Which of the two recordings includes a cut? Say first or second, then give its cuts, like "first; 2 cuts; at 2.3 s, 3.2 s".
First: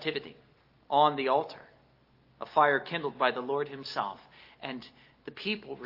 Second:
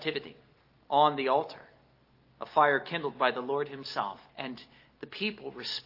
second; 1 cut; at 4.3 s